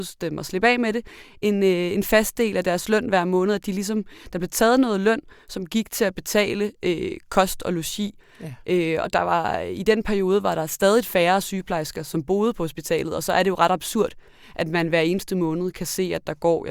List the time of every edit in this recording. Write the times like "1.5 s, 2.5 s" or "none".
8.2 s